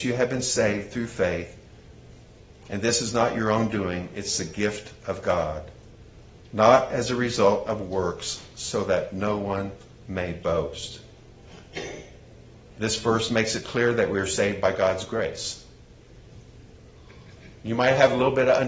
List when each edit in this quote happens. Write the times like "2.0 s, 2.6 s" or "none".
none